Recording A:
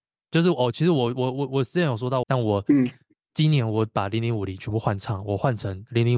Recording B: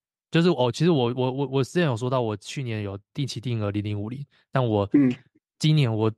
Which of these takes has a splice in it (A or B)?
A